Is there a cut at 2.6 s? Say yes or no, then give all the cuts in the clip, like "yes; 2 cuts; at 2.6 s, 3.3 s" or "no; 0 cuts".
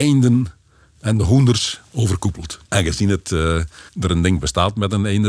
yes; 2 cuts; at 2.6 s, 3.9 s